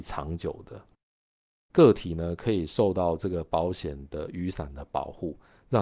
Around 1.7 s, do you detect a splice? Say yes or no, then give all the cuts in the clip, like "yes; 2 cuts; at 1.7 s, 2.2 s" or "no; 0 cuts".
yes; 1 cut; at 1.7 s